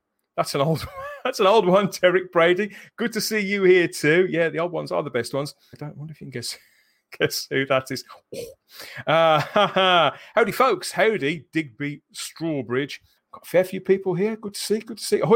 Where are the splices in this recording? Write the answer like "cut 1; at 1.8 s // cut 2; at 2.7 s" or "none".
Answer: cut 1; at 5.7 s // cut 2; at 13.2 s